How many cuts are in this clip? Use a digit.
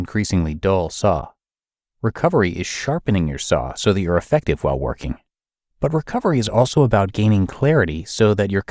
0